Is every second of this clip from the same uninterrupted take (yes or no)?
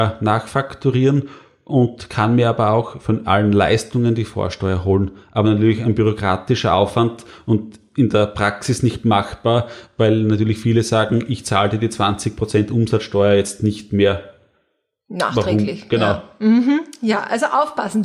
yes